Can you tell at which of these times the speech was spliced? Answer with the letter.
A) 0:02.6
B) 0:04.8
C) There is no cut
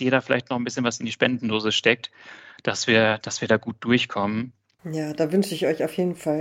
B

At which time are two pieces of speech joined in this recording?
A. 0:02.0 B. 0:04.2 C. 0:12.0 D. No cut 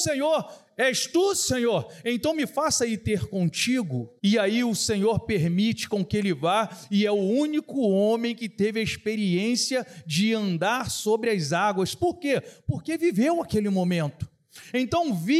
B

